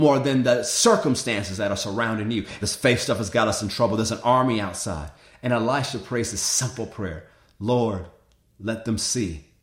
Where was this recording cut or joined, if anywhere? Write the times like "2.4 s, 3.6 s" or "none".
2.6 s